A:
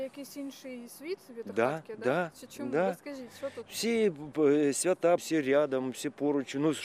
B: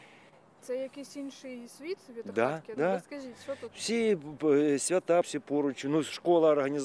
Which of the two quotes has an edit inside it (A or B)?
B